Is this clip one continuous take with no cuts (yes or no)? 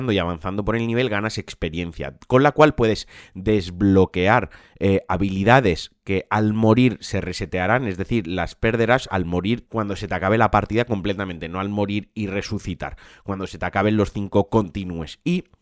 no